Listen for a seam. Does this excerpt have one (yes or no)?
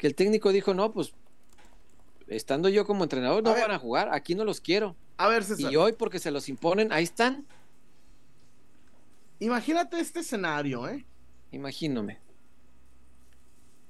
no